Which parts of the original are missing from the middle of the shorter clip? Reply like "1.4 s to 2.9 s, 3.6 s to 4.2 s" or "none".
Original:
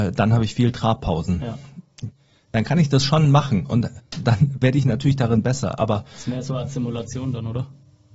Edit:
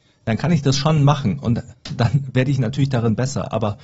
none